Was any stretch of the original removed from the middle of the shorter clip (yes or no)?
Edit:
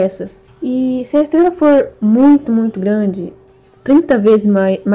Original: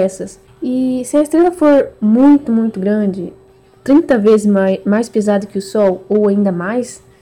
no